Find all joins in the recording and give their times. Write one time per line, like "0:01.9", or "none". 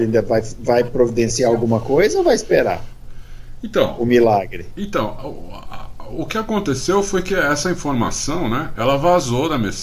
none